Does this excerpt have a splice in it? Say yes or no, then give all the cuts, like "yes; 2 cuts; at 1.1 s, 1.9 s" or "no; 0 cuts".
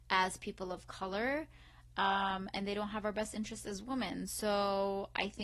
no; 0 cuts